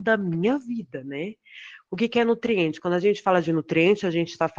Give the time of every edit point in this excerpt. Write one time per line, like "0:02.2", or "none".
0:01.9